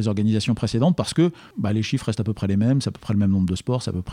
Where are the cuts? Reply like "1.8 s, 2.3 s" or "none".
none

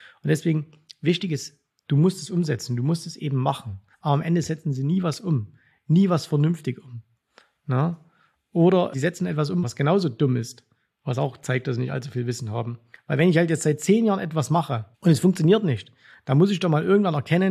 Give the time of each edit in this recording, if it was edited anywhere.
3.9 s, 9.6 s, 14.9 s

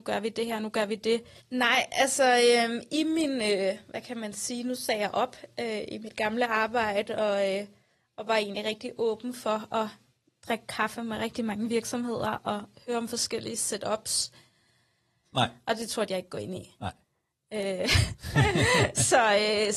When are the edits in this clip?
1.4 s, 15.2 s

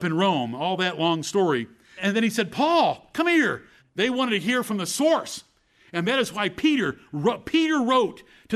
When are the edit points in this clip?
2.0 s, 3.8 s

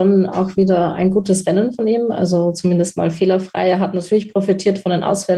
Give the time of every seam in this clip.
none

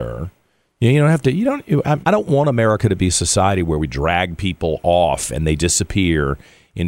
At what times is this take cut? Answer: 2.0 s, 5.6 s

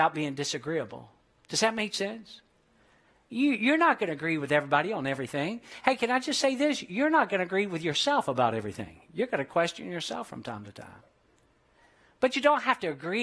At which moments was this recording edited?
none

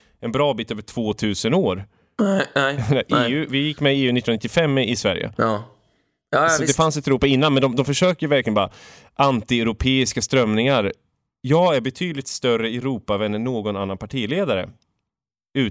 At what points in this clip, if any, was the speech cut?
none

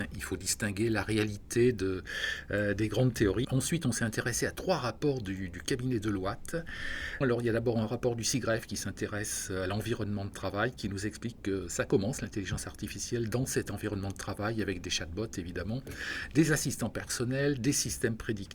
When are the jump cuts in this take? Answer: 3.4 s, 7.2 s

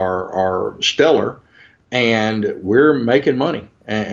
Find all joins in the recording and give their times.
none

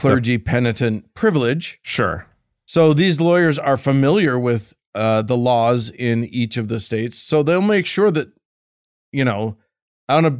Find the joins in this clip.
none

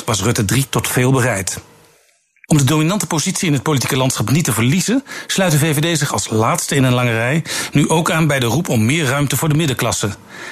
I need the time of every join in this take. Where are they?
none

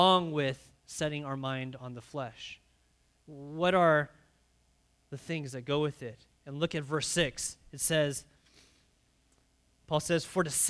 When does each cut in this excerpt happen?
none

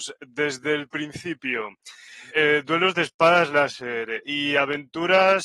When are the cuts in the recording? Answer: 2.3 s, 4.2 s

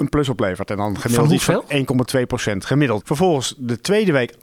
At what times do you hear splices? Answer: 3.0 s

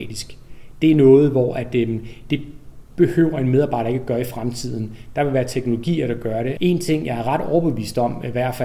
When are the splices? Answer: 6.6 s

